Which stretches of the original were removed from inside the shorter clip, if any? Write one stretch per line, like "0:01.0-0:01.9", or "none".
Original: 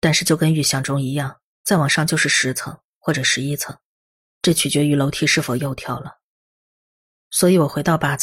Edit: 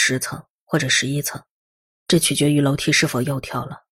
none